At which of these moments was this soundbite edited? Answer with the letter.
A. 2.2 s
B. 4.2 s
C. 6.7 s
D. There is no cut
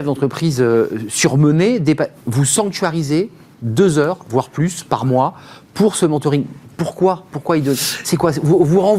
A